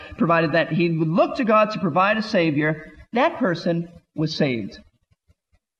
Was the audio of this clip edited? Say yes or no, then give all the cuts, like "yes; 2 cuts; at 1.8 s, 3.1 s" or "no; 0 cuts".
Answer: no; 0 cuts